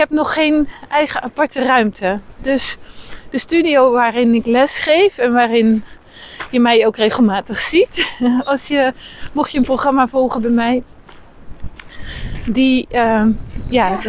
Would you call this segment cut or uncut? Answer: uncut